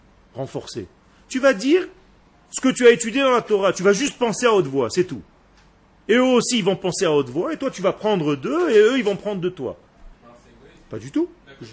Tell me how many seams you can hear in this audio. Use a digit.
1